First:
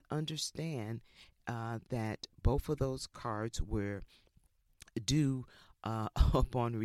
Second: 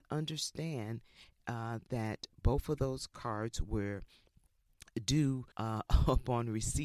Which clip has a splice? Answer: second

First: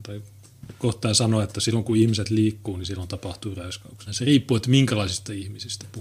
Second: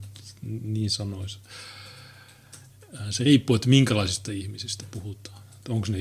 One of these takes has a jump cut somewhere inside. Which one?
first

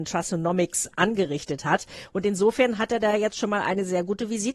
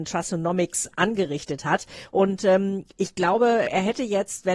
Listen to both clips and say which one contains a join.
second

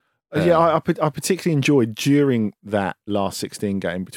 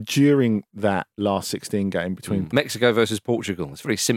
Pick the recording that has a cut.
second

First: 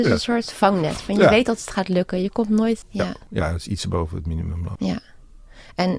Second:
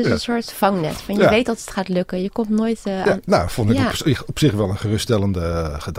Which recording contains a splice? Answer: first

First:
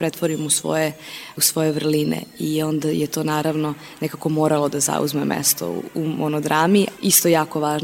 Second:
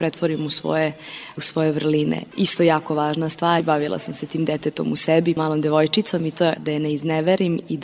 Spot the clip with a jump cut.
second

